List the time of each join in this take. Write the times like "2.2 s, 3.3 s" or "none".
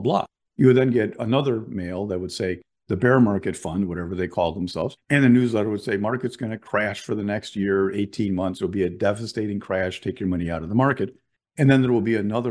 none